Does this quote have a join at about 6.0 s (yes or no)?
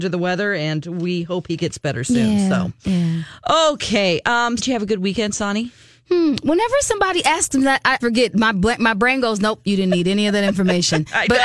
no